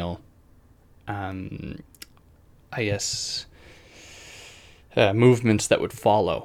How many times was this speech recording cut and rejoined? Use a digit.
0